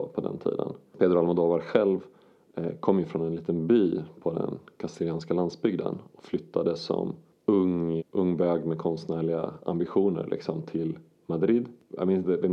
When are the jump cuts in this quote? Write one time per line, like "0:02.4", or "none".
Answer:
0:08.0

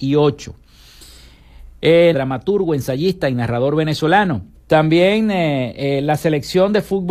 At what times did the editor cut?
0:02.1
0:04.6

